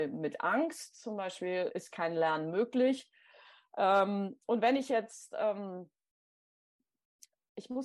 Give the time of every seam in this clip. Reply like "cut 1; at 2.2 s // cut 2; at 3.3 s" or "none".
cut 1; at 1.7 s